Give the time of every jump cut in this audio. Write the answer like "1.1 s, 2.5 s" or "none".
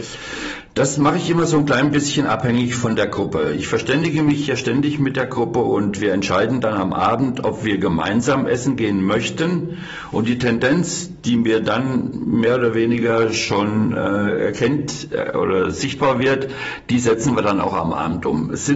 none